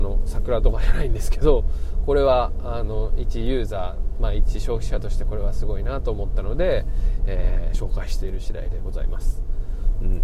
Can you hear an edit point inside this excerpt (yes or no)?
no